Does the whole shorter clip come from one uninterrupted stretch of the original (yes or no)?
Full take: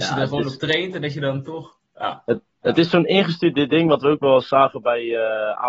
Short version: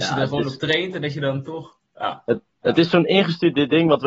yes